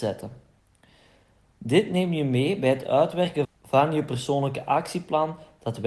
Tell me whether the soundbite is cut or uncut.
cut